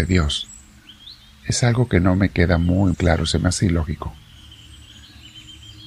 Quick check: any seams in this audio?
yes; 1 cut; at 2.9 s

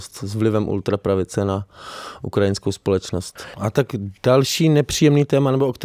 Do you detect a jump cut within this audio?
yes; 1 cut; at 3.5 s

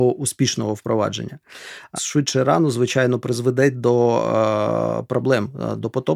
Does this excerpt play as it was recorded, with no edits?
no; 1 cut; at 2.0 s

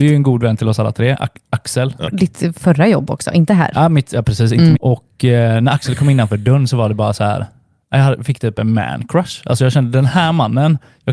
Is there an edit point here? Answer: yes; 2 cuts; at 2.1 s, 4.8 s

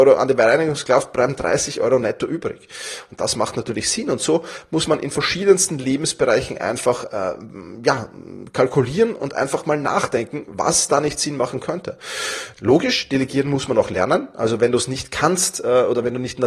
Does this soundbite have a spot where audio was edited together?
yes; 1 cut; at 12.5 s

